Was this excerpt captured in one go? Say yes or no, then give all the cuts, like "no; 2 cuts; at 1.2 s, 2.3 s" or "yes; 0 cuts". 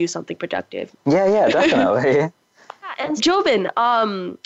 no; 2 cuts; at 0.9 s, 3.2 s